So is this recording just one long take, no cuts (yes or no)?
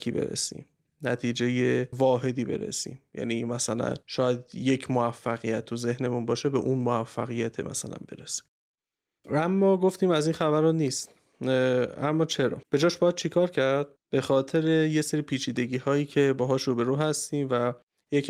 no